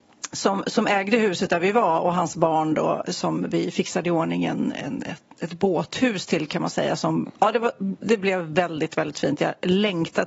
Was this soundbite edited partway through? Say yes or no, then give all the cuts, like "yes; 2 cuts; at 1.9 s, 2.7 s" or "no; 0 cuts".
no; 0 cuts